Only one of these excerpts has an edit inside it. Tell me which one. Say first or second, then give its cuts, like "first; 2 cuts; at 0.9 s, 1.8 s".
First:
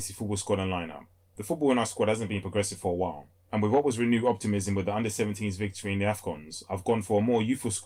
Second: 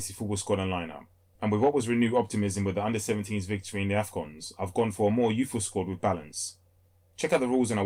second; 1 cut; at 1.4 s